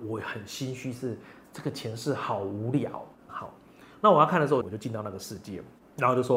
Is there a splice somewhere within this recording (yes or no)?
yes